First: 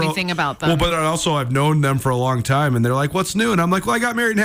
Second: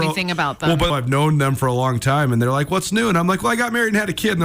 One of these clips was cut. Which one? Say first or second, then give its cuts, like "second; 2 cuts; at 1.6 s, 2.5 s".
second; 1 cut; at 0.9 s